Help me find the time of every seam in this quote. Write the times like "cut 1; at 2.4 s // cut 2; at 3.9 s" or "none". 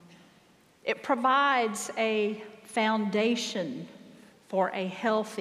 cut 1; at 4.3 s